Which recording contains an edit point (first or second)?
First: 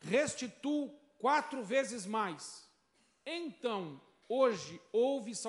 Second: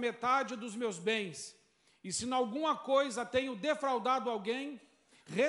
first